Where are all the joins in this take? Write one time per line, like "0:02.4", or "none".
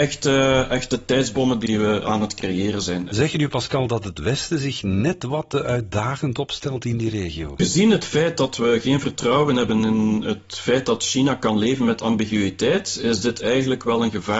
none